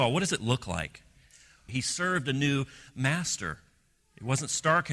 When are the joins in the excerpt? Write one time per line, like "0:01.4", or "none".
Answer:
0:01.7